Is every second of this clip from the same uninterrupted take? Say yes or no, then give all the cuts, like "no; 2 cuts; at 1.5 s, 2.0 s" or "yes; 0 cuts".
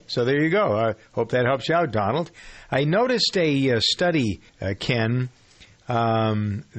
no; 1 cut; at 4.5 s